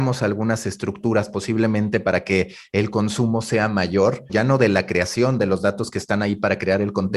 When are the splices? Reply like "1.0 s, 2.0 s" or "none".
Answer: 4.3 s